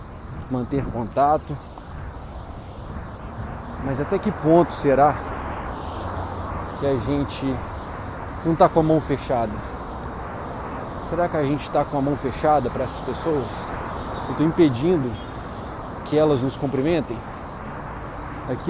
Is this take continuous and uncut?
no; 1 cut; at 14.4 s

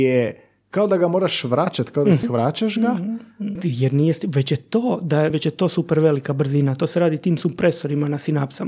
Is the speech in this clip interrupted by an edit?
yes; 3 cuts; at 2.2 s, 3.6 s, 5.3 s

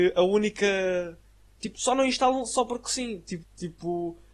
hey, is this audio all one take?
no; 2 cuts; at 1.6 s, 3.4 s

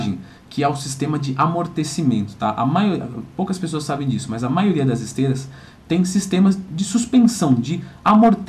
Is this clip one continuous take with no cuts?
yes; 0 cuts

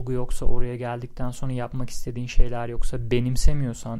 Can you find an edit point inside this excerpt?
no; 0 cuts

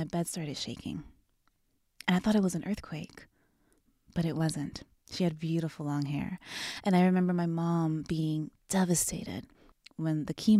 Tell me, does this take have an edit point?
yes; 1 cut; at 5.0 s

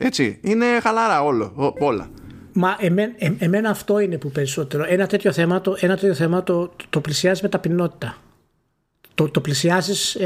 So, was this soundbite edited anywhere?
no; 0 cuts

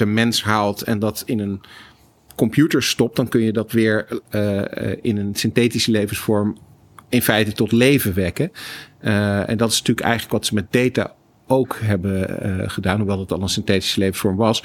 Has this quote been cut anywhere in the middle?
no; 0 cuts

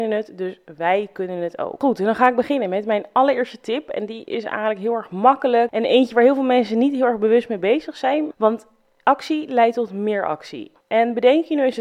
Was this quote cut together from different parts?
yes; 1 cut; at 8.3 s

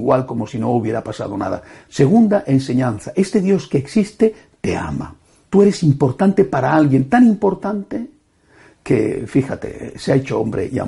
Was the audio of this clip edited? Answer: yes; 2 cuts; at 1.9 s, 5.4 s

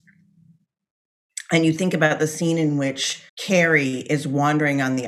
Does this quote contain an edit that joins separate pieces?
yes; 1 cut; at 3.3 s

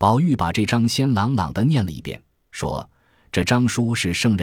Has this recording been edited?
no; 0 cuts

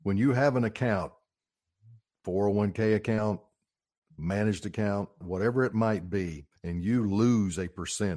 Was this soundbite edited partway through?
yes; 2 cuts; at 5.2 s, 6.6 s

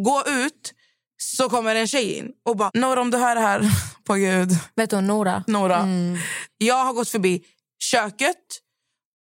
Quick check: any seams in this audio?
yes; 2 cuts; at 2.7 s, 6.5 s

